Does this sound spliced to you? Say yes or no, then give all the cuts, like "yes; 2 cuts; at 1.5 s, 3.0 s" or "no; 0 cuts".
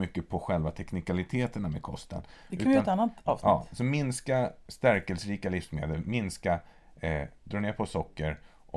yes; 1 cut; at 7.4 s